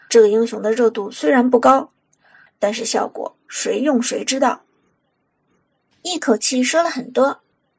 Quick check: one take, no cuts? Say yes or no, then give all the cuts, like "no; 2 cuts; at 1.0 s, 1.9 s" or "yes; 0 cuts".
yes; 0 cuts